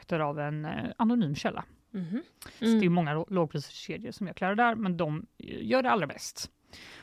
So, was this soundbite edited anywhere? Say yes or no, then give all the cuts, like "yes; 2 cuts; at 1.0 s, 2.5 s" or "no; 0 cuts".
yes; 1 cut; at 2.6 s